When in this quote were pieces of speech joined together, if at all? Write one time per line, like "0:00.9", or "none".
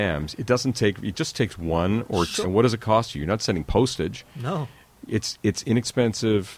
0:02.4